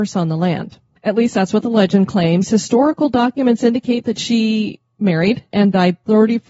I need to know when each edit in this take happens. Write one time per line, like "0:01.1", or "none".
0:05.5

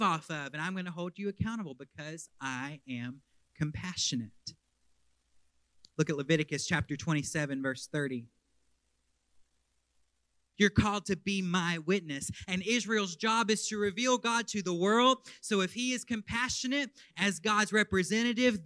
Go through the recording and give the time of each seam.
0:10.5

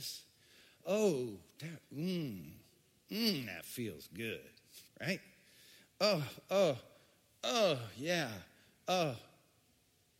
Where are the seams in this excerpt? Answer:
0:04.9

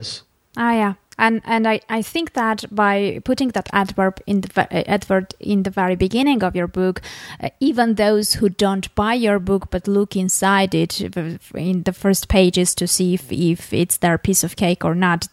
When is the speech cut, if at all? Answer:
none

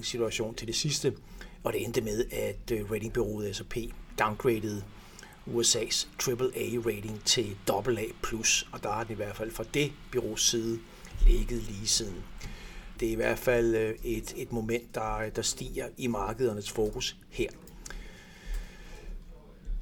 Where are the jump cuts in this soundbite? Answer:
0:13.0

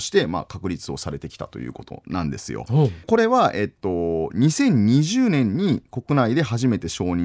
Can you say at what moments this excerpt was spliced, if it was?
0:03.0

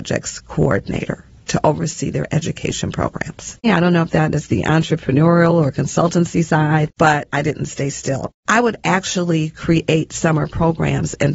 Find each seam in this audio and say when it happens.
0:03.6
0:08.4

